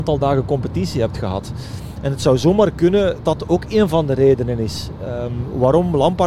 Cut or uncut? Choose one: cut